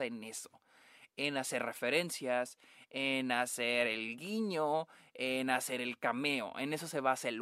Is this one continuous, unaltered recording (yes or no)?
yes